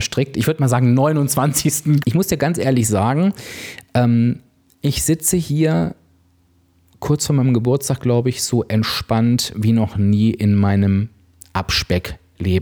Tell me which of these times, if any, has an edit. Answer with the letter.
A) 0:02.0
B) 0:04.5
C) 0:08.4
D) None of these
A